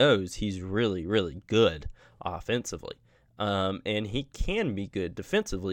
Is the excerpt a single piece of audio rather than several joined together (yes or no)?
yes